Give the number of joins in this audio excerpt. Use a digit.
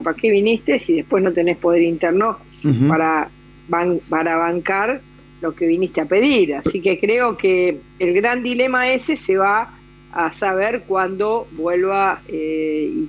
0